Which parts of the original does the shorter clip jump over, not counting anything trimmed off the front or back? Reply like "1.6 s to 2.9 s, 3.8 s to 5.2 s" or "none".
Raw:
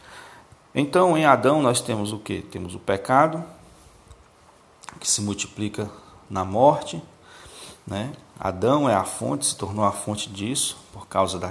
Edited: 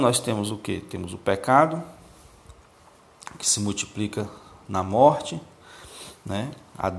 none